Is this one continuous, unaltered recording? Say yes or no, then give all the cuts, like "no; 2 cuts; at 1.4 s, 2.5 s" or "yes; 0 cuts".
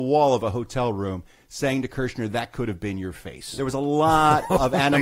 no; 1 cut; at 3.6 s